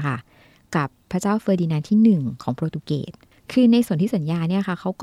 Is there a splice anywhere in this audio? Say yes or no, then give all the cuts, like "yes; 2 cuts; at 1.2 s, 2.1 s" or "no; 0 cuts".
no; 0 cuts